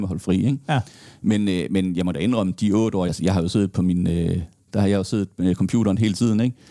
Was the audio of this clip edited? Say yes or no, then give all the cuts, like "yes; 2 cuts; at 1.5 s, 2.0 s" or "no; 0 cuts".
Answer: yes; 2 cuts; at 3.1 s, 4.7 s